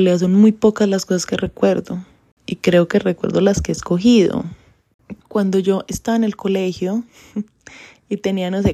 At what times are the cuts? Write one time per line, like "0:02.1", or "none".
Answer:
0:05.2